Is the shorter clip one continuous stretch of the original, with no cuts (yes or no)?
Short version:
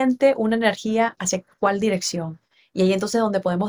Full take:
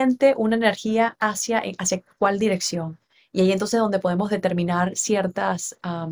no